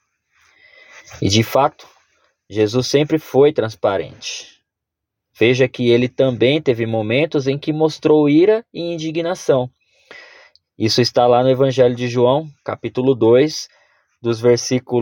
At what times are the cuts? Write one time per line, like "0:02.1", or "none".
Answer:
none

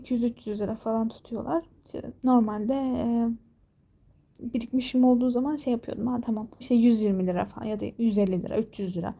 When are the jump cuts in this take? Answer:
0:04.4
0:06.6

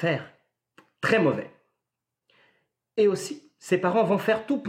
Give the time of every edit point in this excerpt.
none

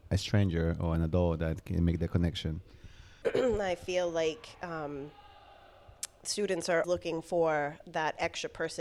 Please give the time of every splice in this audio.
0:03.2
0:06.8

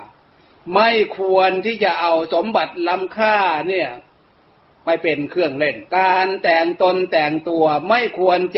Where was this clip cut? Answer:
0:05.9

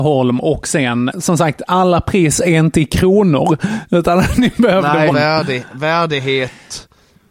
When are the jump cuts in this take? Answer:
0:01.1
0:05.1

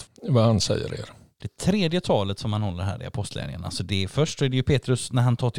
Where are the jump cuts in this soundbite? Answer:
0:01.4

